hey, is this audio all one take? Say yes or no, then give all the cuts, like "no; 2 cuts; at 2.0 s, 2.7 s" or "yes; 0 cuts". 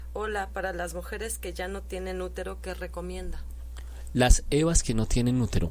yes; 0 cuts